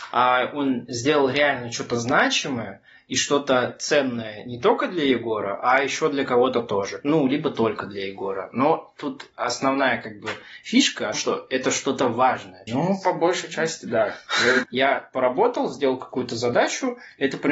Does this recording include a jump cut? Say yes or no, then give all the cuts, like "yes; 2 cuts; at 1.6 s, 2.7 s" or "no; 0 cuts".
yes; 3 cuts; at 11.1 s, 12.7 s, 14.6 s